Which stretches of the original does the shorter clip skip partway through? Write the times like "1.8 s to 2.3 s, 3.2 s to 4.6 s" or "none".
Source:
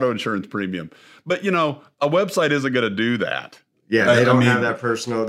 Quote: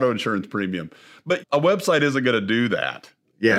1.4 s to 1.9 s

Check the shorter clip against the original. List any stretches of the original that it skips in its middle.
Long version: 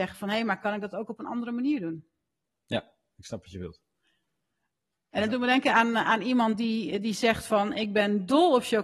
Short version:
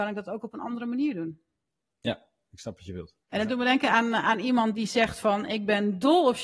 3.9 s to 5.0 s, 6.6 s to 7.0 s

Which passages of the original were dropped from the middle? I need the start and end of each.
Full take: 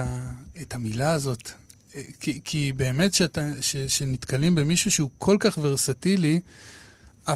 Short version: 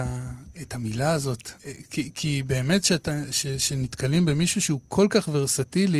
1.6 s to 1.9 s

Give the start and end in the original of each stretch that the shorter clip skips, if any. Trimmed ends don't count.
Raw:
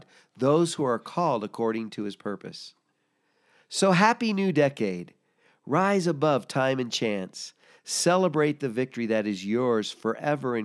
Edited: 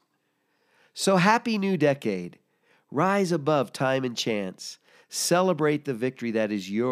none

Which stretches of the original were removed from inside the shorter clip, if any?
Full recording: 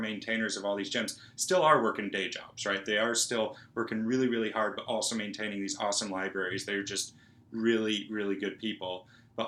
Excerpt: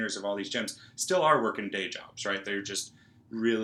2.8 s to 6.7 s

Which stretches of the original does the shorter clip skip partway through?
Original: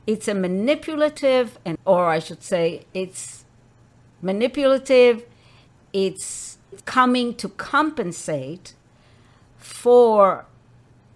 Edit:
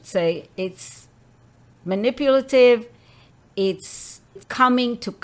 none

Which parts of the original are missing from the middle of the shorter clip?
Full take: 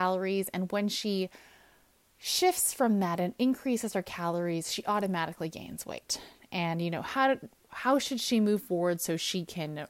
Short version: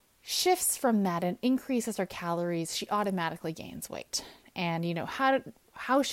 none

